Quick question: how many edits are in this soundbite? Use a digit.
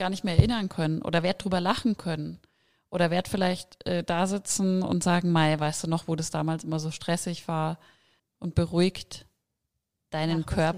1